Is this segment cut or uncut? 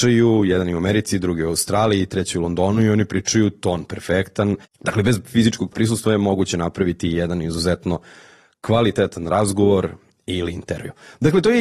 cut